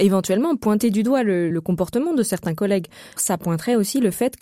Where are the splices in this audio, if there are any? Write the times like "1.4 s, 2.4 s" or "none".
1.5 s, 3.2 s